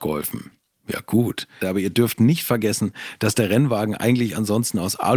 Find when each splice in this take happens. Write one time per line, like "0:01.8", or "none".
0:01.6

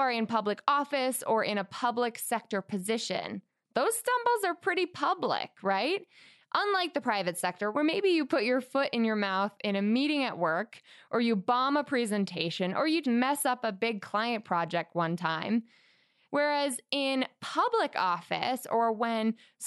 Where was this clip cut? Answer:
0:13.0
0:16.2

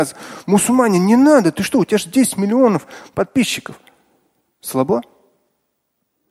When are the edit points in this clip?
none

